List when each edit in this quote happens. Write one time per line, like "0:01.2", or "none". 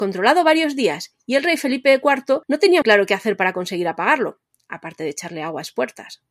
0:02.8